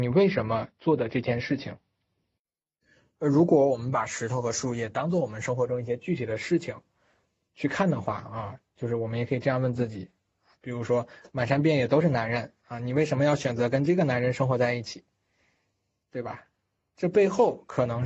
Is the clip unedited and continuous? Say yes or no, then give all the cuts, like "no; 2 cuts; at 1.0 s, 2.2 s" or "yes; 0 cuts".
yes; 0 cuts